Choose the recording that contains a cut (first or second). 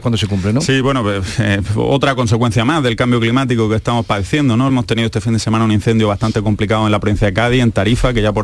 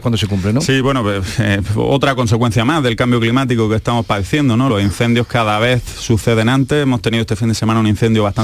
first